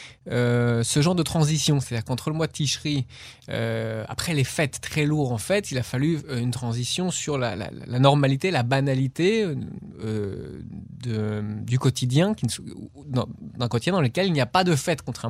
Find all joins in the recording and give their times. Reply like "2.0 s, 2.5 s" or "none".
none